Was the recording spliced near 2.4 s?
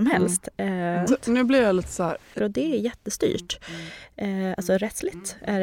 yes; 2 cuts; at 1.1 s, 2.4 s

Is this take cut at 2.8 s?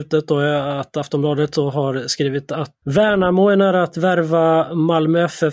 yes; 1 cut; at 2.8 s

